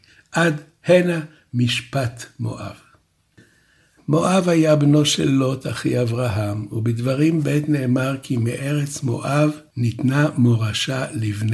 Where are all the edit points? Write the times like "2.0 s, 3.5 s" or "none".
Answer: 4.0 s